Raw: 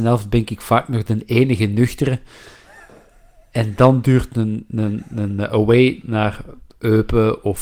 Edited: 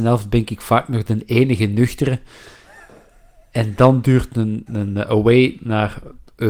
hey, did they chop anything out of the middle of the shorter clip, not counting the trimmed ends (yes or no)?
yes